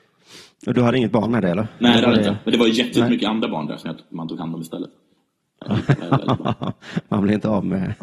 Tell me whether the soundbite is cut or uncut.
uncut